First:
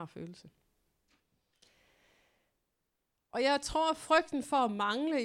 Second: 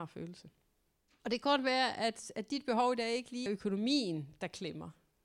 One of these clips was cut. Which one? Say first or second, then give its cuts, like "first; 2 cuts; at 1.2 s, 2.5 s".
second; 2 cuts; at 1.2 s, 3.5 s